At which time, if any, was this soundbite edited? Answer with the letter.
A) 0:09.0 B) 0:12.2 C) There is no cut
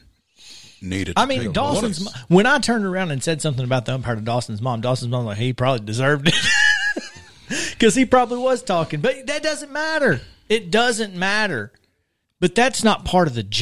B